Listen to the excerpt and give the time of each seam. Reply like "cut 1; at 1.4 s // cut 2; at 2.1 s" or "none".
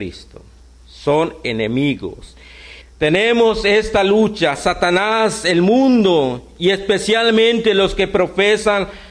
cut 1; at 2.8 s

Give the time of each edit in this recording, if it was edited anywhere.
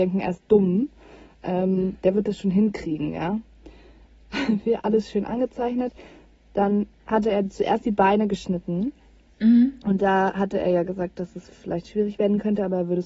none

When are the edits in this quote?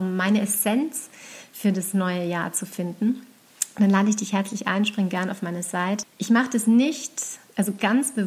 cut 1; at 6.0 s

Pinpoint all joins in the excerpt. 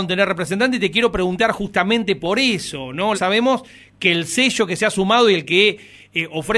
cut 1; at 3.1 s

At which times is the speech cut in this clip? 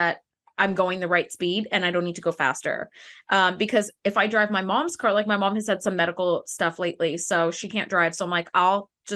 none

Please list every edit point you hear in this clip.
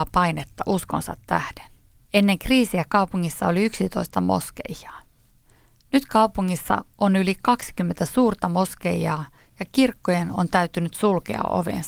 cut 1; at 2.1 s

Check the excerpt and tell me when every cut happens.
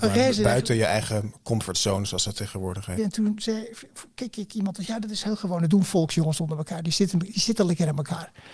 cut 1; at 3.0 s

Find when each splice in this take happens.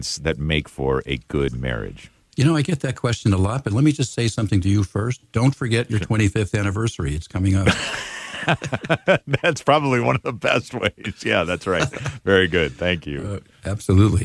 none

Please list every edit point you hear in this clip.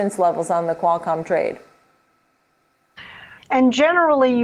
cut 1; at 3.4 s

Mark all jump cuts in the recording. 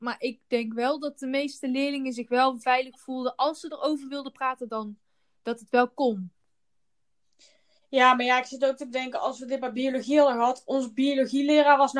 none

